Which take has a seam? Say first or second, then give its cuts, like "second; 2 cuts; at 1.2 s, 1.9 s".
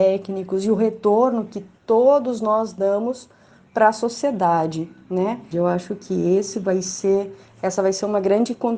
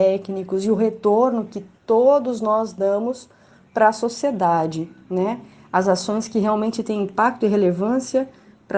first; 1 cut; at 5.5 s